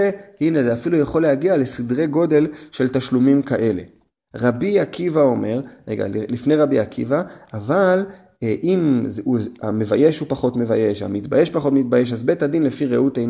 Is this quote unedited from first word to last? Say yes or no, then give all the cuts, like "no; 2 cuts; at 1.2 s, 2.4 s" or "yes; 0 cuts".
yes; 0 cuts